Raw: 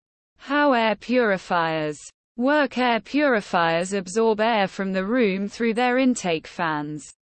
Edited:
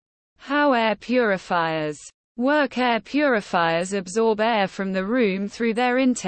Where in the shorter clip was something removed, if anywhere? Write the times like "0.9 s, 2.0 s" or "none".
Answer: none